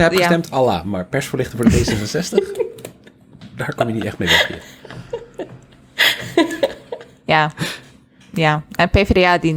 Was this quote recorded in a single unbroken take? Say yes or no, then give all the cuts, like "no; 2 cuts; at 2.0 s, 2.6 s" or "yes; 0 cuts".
yes; 0 cuts